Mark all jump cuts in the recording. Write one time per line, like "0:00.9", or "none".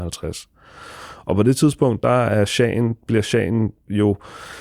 none